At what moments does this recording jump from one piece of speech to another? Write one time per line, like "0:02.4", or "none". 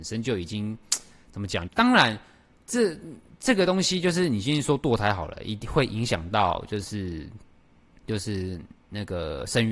0:01.7

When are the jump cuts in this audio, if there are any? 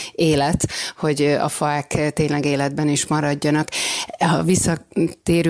none

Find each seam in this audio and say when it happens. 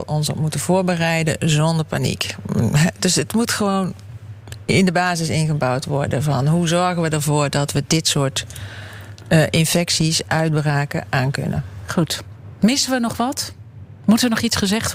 none

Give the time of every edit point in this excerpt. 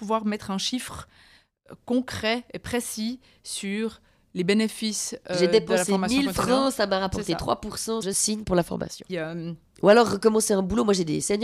0:08.0
0:09.1

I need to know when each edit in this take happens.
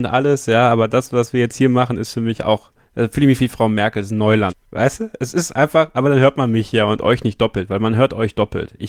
0:04.5

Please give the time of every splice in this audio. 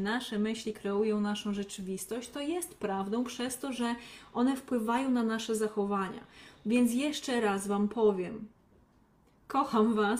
none

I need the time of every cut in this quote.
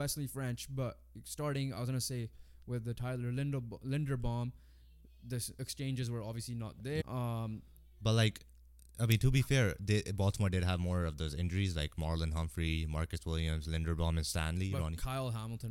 0:07.0

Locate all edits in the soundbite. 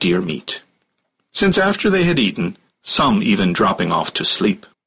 0:01.3
0:02.7

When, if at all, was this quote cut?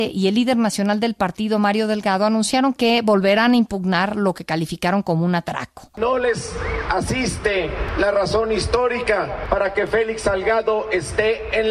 0:05.9

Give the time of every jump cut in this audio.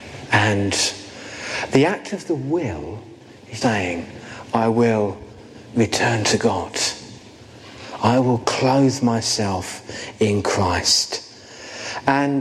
0:03.6
0:08.0

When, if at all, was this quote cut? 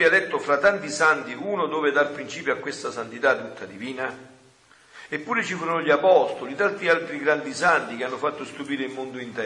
none

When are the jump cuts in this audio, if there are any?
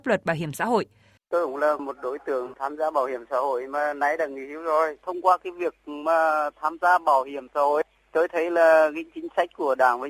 0:01.2

